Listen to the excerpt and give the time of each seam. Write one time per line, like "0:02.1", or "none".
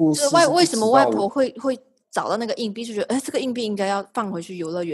0:01.3